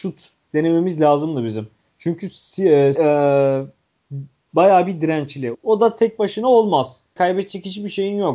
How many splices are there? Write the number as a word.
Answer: three